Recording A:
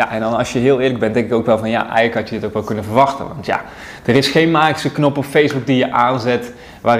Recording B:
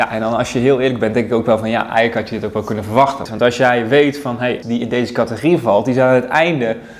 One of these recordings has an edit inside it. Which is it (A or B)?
B